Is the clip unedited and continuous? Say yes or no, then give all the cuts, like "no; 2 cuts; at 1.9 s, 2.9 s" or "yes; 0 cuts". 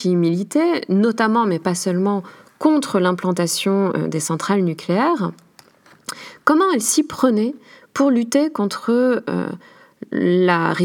yes; 0 cuts